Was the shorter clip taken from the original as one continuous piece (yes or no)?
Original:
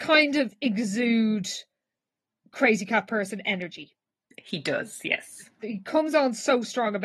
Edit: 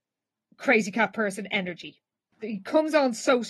no